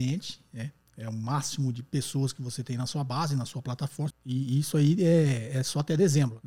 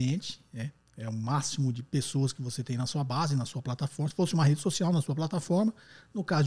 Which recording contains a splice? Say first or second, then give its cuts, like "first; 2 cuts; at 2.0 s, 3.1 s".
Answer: first; 1 cut; at 4.1 s